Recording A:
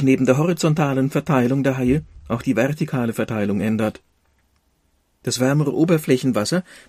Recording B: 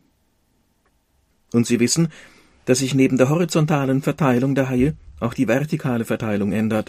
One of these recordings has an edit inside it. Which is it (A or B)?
B